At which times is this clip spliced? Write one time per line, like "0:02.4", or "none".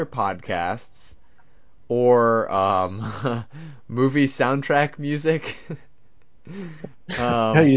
none